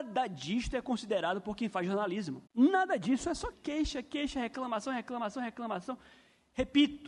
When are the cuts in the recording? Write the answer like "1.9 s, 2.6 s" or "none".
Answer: 2.5 s, 3.5 s